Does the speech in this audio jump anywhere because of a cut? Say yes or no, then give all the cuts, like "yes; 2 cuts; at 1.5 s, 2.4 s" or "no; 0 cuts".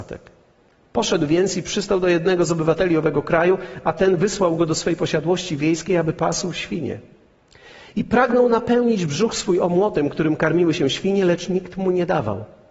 no; 0 cuts